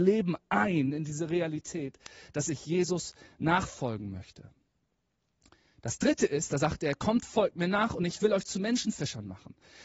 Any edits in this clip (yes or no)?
no